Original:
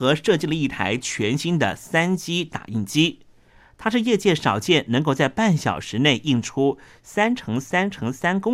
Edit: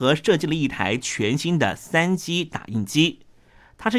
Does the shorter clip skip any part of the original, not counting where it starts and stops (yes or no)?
no